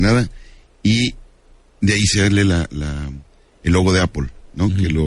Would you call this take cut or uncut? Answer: uncut